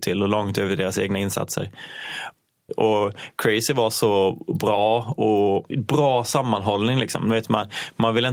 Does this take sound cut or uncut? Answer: cut